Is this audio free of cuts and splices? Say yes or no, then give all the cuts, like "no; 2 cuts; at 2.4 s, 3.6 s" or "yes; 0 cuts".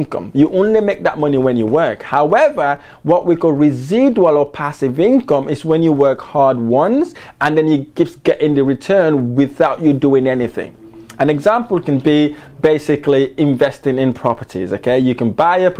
yes; 0 cuts